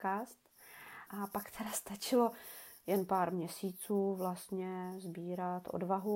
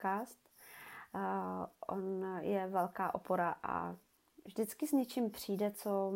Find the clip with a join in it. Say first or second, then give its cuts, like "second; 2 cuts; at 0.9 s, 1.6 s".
first; 1 cut; at 1.1 s